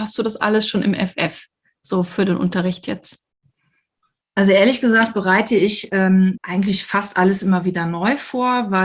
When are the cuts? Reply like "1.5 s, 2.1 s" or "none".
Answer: 6.4 s